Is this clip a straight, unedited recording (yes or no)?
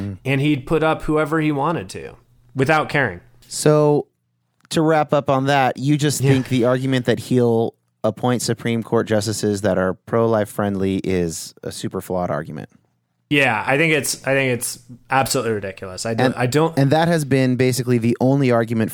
yes